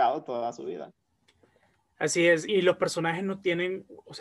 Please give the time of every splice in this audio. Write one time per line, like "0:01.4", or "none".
0:02.5